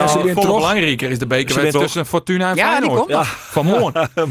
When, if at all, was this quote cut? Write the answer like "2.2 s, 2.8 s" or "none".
1.7 s